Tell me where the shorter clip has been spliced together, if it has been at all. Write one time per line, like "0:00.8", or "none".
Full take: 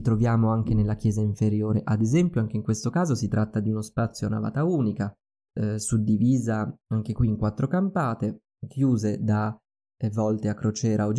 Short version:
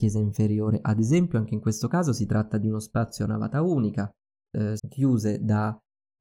0:04.8